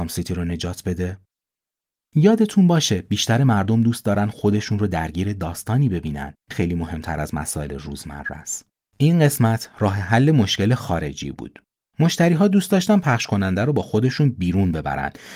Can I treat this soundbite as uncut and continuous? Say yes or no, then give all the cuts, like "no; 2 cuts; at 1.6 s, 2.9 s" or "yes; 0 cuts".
no; 2 cuts; at 6.5 s, 8.8 s